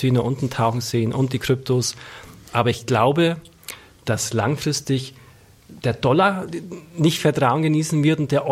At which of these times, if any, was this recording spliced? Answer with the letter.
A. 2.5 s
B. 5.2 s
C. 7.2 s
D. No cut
C